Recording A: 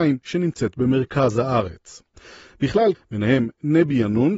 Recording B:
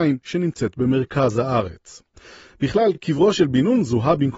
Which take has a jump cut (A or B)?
A